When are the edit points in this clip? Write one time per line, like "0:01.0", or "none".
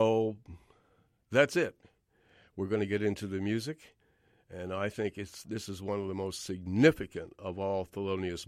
none